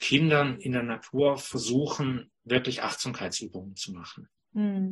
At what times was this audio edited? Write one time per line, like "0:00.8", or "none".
none